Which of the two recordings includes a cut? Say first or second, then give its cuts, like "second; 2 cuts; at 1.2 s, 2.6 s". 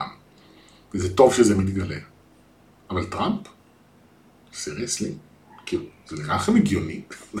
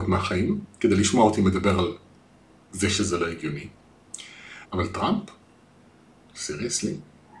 second; 1 cut; at 4.6 s